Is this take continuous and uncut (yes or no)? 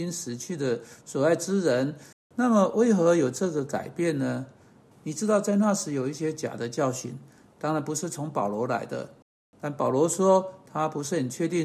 no